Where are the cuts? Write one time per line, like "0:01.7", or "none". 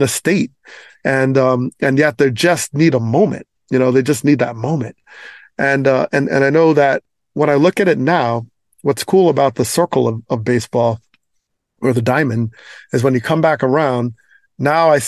none